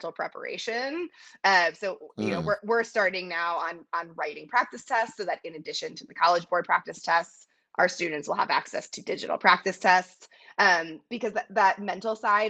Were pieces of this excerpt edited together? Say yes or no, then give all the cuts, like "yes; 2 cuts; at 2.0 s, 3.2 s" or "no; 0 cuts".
no; 0 cuts